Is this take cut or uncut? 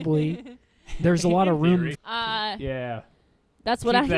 cut